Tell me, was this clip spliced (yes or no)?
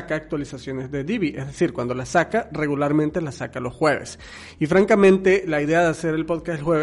no